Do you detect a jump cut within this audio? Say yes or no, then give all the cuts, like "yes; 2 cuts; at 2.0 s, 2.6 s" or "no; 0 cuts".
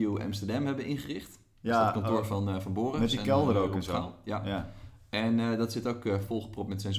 no; 0 cuts